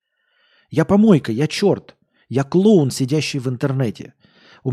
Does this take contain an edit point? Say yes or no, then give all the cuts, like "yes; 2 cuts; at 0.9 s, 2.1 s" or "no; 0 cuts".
no; 0 cuts